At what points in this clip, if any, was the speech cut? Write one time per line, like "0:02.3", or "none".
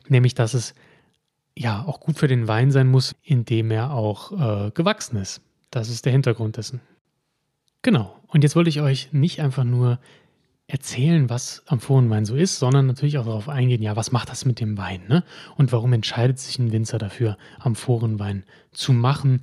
0:03.1